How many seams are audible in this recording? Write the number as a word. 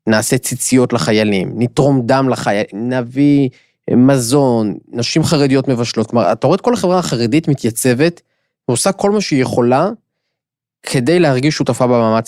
zero